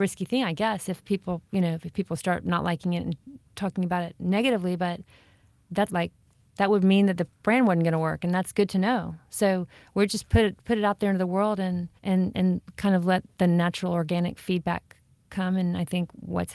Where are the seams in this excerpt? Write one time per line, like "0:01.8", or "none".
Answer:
0:05.9
0:12.0